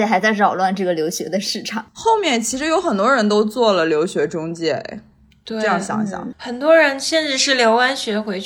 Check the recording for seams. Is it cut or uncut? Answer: cut